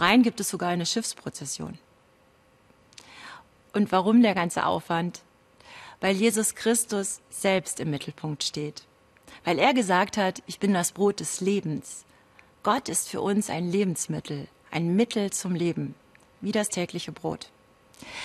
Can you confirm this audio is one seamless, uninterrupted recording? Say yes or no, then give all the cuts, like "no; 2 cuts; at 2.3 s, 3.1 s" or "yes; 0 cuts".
yes; 0 cuts